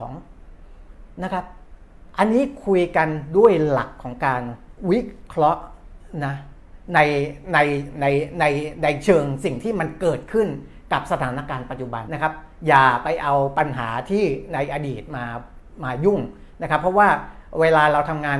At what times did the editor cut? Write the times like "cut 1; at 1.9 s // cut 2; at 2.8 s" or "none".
cut 1; at 12.1 s

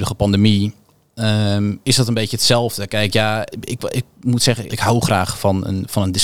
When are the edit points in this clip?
cut 1; at 3.5 s // cut 2; at 4.7 s

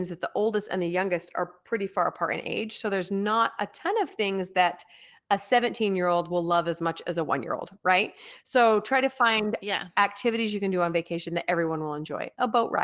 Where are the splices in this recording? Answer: none

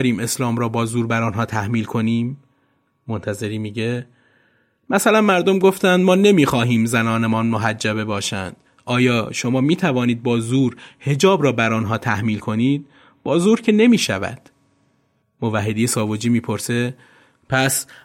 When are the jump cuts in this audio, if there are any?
none

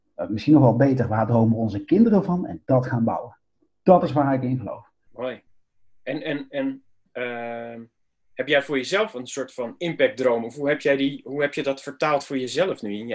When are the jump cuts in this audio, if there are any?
cut 1; at 5.0 s

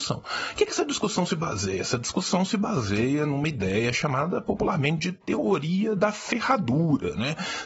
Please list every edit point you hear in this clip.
none

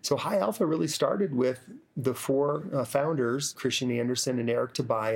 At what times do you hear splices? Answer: cut 1; at 3.5 s

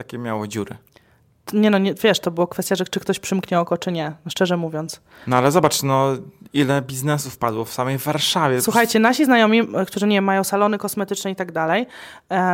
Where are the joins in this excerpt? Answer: none

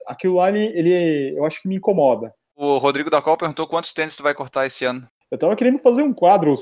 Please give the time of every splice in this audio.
none

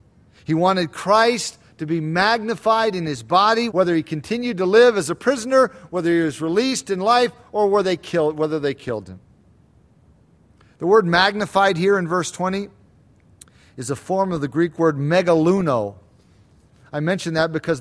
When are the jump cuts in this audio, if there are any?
cut 1; at 3.7 s

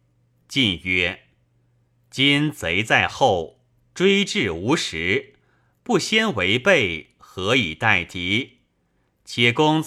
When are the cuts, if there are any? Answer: none

